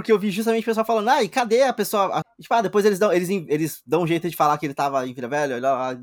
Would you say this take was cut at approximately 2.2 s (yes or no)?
yes